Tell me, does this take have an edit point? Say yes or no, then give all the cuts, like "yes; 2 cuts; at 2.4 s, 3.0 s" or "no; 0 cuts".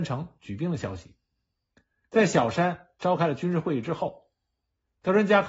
no; 0 cuts